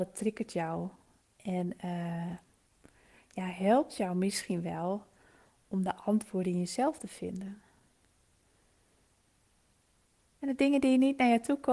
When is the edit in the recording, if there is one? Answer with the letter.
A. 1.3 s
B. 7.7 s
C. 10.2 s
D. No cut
A